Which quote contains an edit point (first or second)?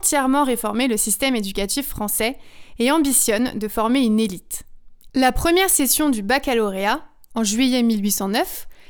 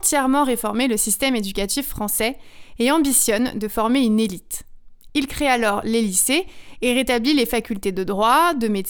first